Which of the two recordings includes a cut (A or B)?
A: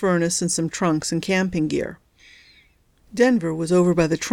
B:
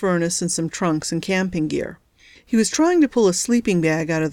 B